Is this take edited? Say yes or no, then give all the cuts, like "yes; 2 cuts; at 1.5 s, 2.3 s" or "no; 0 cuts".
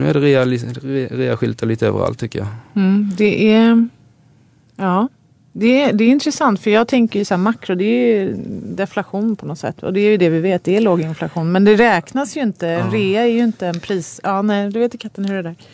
no; 0 cuts